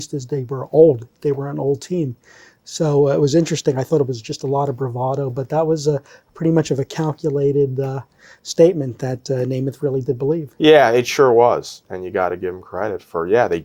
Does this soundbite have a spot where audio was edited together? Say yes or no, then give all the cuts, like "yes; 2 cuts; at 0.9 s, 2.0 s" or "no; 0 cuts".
no; 0 cuts